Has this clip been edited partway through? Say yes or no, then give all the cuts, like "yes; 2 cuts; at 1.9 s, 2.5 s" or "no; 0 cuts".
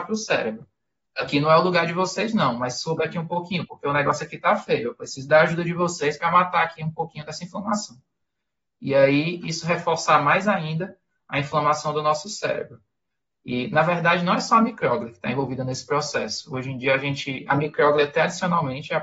no; 0 cuts